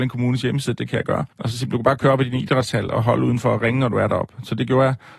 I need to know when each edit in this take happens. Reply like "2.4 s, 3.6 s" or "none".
1.3 s